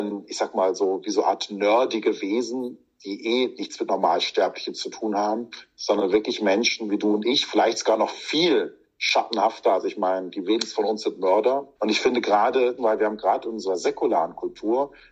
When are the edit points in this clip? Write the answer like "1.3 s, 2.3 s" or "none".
11.7 s, 12.8 s